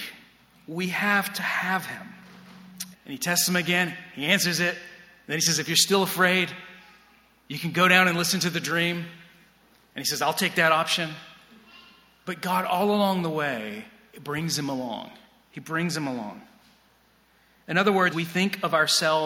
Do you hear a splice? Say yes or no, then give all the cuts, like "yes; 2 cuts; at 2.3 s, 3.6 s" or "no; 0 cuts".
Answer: yes; 2 cuts; at 2.9 s, 18.1 s